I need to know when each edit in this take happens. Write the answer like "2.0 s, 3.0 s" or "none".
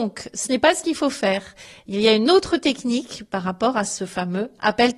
none

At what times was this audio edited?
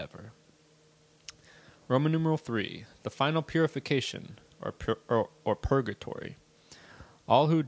none

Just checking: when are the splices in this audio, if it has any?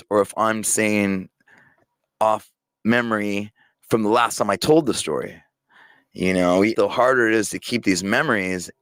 6.7 s

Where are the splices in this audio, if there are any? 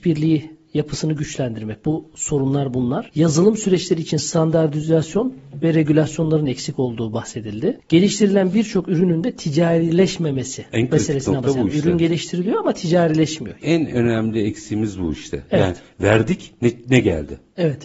13.6 s

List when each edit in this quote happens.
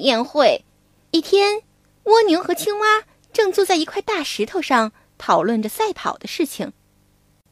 1.1 s

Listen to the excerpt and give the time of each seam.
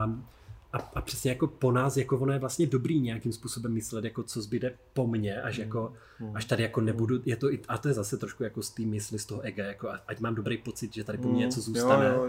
none

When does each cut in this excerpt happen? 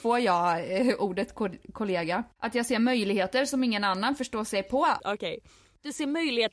2.3 s, 5.0 s

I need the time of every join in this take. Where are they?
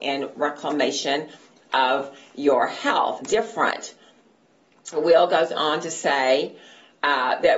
3.2 s, 4.9 s

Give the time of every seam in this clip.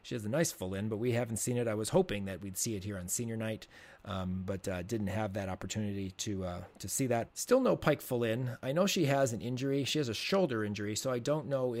7.3 s

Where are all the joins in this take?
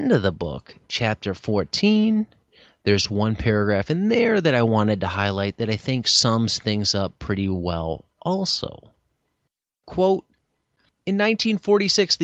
none

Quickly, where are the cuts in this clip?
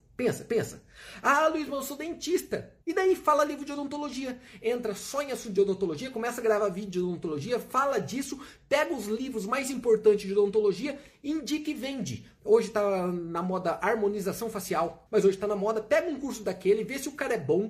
2.8 s, 12.4 s, 15.1 s

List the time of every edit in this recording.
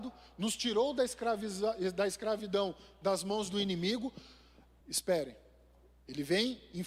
4.8 s

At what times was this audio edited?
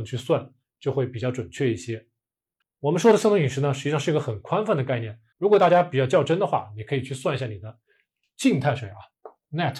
2.6 s, 5.3 s

